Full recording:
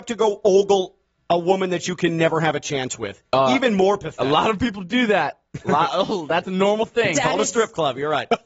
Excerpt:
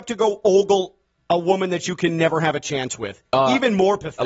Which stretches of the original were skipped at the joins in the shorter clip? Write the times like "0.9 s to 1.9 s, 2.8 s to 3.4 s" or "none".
none